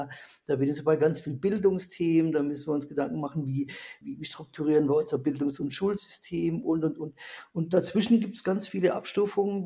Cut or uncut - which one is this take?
cut